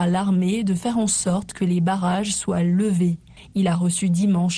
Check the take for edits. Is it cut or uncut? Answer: uncut